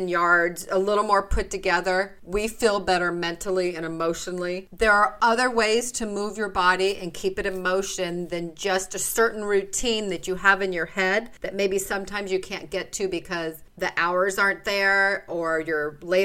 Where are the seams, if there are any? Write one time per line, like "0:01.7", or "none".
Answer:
0:04.7